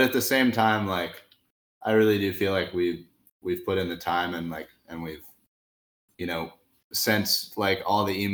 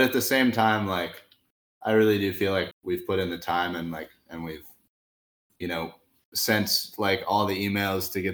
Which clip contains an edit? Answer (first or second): second